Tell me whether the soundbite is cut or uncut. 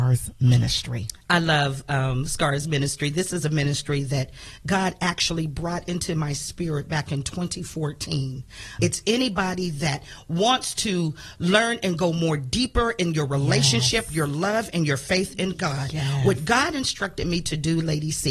cut